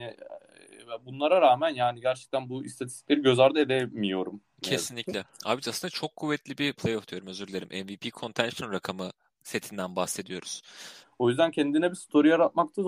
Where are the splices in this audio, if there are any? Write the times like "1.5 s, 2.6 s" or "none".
6.7 s, 11.0 s